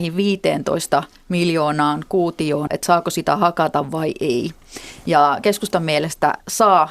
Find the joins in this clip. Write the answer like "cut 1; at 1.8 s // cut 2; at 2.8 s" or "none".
cut 1; at 2.7 s